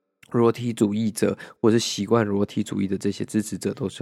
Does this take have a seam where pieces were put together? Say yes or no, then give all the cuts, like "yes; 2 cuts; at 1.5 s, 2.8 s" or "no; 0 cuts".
no; 0 cuts